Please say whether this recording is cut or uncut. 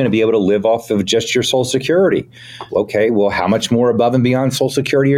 cut